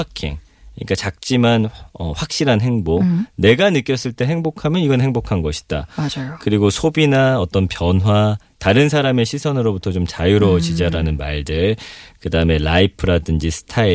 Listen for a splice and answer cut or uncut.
cut